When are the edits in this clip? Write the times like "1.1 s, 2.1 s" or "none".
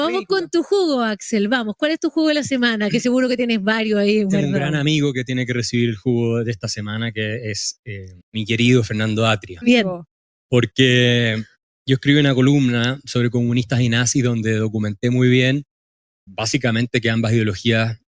8.2 s, 9.6 s, 16.3 s

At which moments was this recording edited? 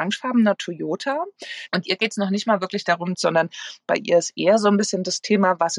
1.7 s, 3.1 s

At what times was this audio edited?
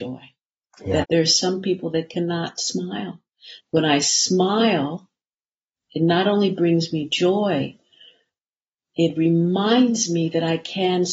1.0 s, 3.6 s

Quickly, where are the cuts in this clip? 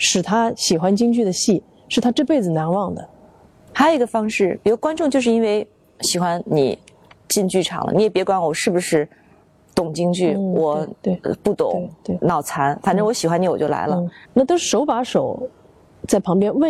3.7 s, 14.2 s

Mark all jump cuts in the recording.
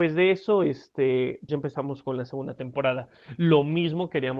1.5 s

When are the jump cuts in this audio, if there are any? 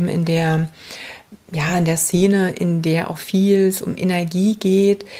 none

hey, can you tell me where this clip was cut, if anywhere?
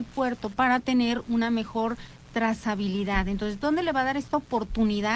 none

